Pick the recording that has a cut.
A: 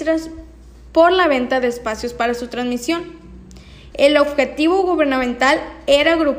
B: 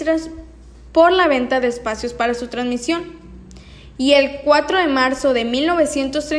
A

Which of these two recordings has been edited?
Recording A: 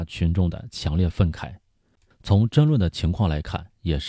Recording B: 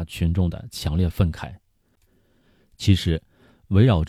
A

